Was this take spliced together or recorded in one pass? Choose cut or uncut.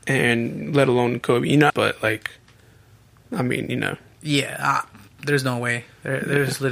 cut